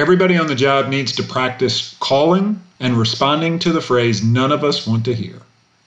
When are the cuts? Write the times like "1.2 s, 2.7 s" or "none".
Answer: 2.8 s